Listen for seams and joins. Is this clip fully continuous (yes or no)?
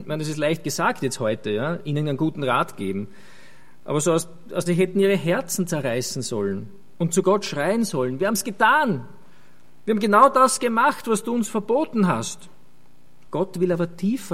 no